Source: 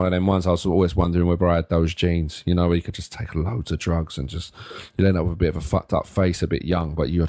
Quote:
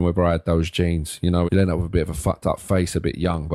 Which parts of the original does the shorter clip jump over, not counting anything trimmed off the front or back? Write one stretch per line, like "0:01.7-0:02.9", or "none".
0:02.7-0:04.9